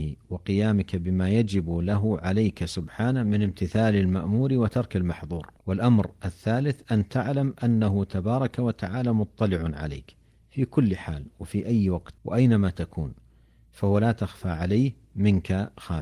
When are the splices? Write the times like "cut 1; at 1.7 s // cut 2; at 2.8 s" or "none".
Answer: cut 1; at 5.6 s // cut 2; at 12.2 s

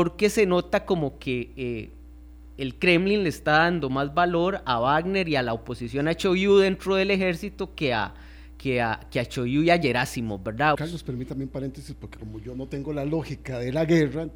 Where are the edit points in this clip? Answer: cut 1; at 10.8 s

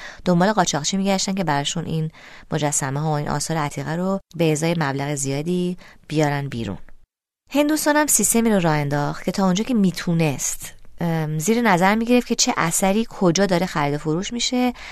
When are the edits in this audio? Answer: none

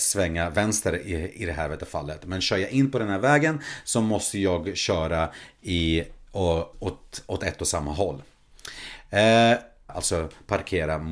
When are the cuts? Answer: cut 1; at 6.7 s // cut 2; at 9.9 s

